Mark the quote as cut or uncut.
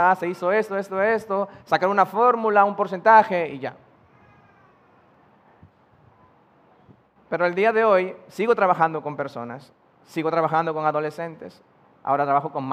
uncut